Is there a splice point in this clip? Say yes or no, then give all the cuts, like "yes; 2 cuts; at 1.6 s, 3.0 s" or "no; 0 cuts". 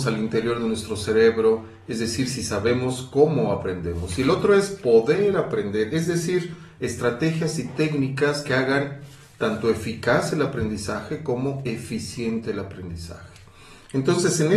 no; 0 cuts